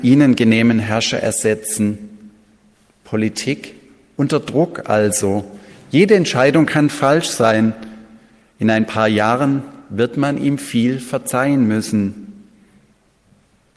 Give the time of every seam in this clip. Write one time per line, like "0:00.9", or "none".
none